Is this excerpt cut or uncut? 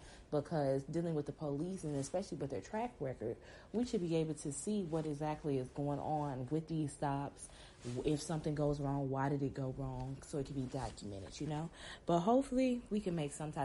uncut